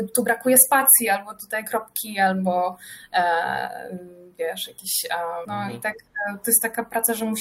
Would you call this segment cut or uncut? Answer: cut